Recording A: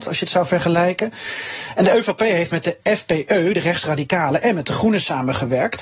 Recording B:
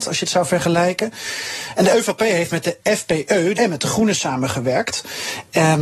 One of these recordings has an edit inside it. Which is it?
B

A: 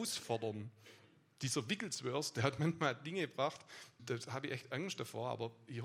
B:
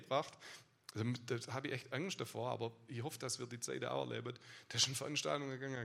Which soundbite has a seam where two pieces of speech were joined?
A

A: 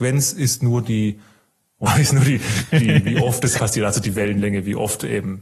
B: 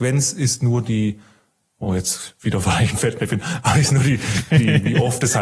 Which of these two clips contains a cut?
A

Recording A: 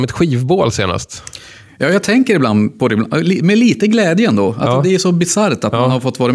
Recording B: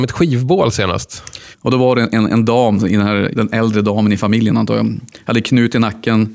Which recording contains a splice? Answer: B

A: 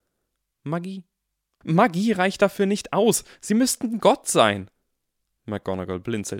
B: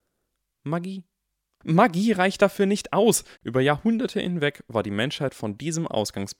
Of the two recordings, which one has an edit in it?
B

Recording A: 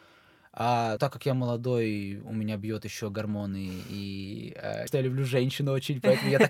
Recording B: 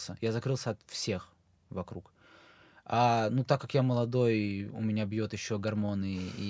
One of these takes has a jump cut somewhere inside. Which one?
A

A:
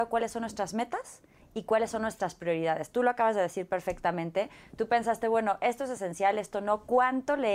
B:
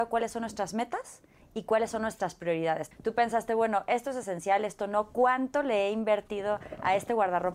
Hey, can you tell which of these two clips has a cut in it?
B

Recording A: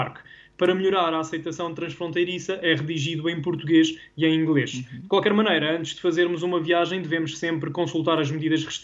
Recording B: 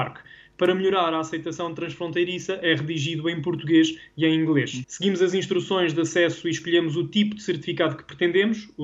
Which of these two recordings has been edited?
B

